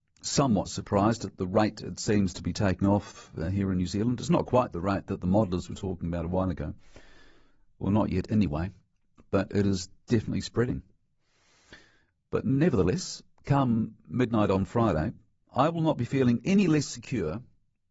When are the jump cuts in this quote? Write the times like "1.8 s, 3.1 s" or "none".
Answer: none